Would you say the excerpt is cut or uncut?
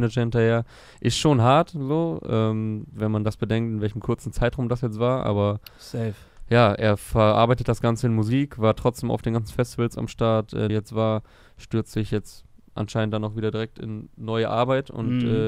cut